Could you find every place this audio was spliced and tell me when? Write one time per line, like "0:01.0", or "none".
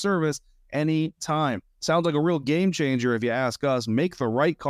none